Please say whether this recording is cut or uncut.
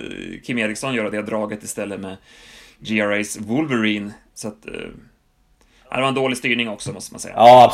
uncut